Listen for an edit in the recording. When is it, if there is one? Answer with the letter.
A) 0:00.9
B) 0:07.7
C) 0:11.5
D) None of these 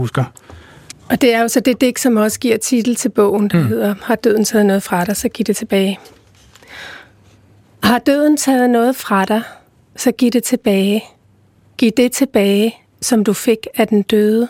A